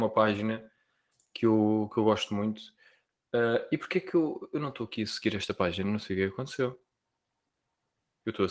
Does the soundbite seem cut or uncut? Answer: uncut